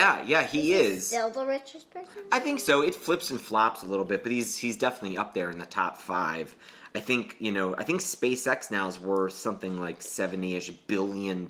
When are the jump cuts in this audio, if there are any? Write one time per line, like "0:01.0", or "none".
none